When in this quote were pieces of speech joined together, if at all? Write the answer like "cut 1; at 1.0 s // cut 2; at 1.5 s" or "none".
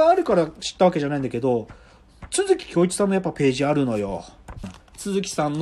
cut 1; at 4.6 s